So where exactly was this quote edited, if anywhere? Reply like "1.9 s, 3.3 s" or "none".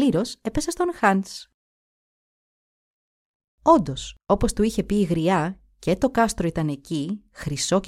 none